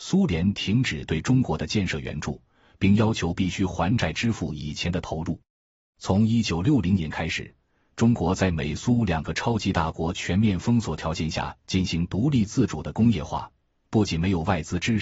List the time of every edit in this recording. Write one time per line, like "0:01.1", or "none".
none